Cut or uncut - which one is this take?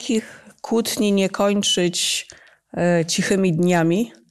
uncut